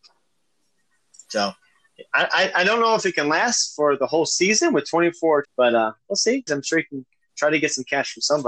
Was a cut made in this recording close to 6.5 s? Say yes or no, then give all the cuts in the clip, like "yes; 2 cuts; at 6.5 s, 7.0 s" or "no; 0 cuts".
yes; 2 cuts; at 5.4 s, 6.5 s